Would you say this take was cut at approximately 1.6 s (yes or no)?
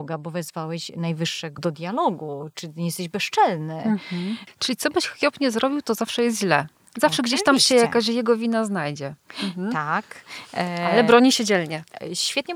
yes